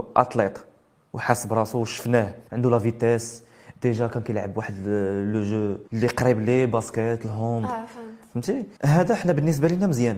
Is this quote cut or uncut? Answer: cut